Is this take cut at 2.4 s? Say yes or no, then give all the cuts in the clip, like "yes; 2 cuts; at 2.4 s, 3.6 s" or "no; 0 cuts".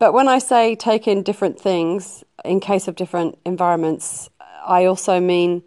yes; 1 cut; at 2.4 s